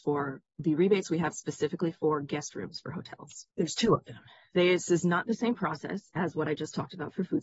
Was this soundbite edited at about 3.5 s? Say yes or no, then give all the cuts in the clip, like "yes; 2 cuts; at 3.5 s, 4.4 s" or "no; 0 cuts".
yes; 1 cut; at 3.5 s